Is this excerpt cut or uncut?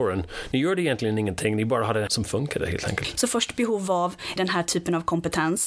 cut